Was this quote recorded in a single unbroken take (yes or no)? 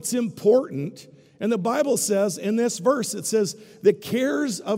yes